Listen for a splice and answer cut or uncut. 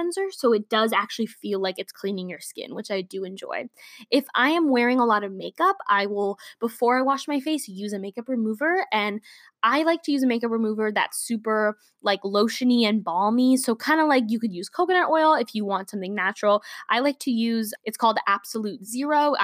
cut